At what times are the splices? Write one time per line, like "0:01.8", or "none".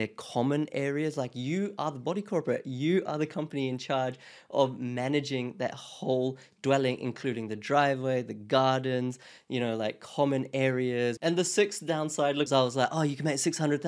0:11.2
0:12.5